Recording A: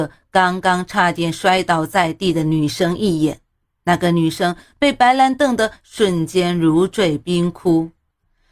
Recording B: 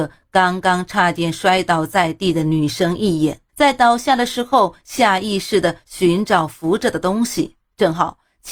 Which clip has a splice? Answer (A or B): B